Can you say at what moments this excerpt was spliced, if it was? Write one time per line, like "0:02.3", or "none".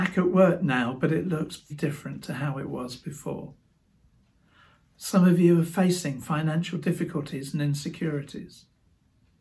0:01.7